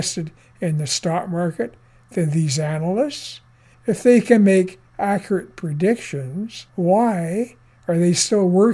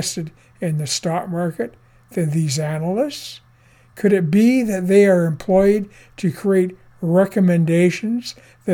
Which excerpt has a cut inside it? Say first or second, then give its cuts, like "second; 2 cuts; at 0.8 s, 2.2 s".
first; 2 cuts; at 3.7 s, 6.7 s